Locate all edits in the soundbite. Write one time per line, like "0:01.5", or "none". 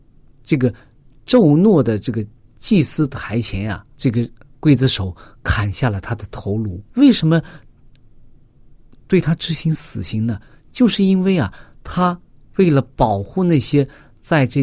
0:03.9
0:06.9